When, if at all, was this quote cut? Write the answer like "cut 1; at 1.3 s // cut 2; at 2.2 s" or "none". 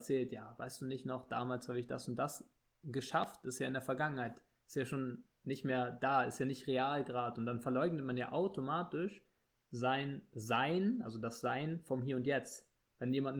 none